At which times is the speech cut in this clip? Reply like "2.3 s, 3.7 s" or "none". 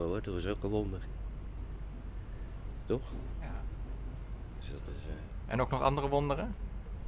none